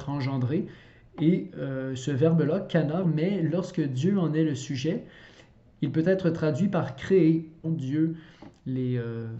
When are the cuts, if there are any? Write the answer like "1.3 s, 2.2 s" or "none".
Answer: 3.0 s, 7.6 s